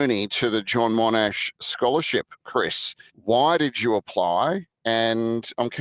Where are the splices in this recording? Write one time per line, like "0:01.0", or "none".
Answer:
0:03.1